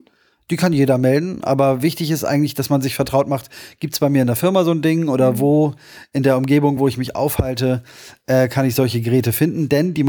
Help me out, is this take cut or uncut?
uncut